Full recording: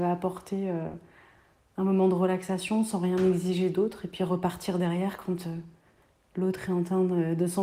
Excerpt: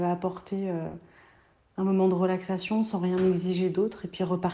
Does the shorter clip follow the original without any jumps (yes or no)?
yes